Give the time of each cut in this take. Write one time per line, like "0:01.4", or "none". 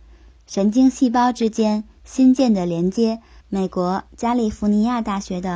0:03.4